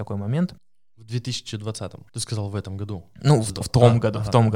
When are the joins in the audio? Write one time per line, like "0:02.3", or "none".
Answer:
0:02.1

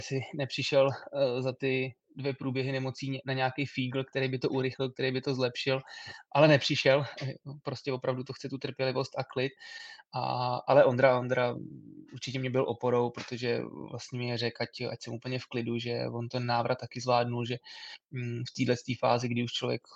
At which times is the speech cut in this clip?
0:06.3

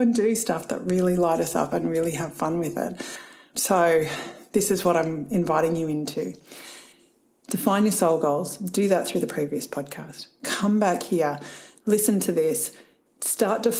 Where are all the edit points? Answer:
0:03.5

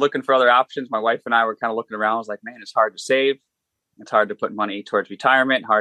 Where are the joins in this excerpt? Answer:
none

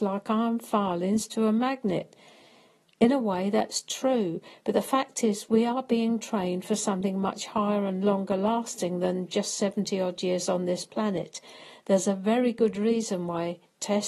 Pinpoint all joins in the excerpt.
none

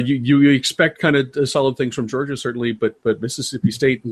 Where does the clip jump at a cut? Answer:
none

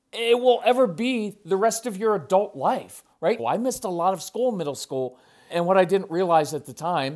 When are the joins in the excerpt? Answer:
0:03.4
0:05.5

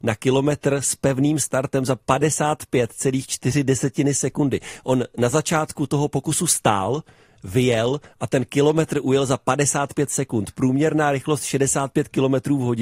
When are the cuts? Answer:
none

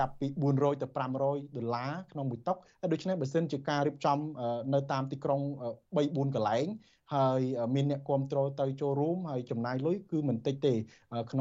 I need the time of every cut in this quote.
none

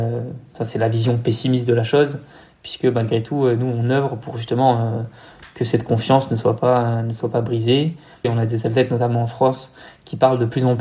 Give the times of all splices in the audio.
0:08.2

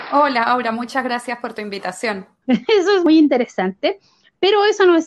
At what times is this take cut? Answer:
0:02.4

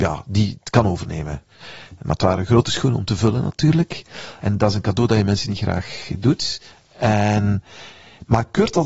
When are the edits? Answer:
0:04.4

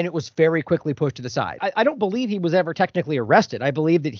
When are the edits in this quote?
0:01.6

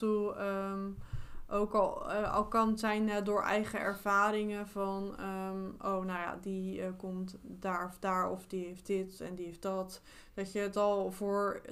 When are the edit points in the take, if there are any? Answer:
none

